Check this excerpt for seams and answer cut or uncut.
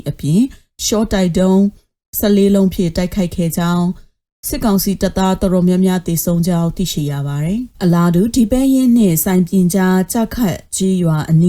cut